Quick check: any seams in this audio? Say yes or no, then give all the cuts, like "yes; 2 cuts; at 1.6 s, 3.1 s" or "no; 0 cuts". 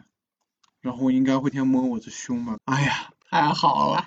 yes; 2 cuts; at 1.5 s, 2.6 s